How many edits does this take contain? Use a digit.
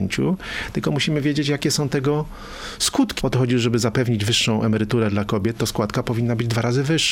1